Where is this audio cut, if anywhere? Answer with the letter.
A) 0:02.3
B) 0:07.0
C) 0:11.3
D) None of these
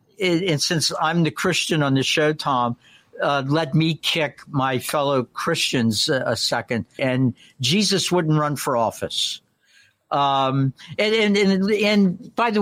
B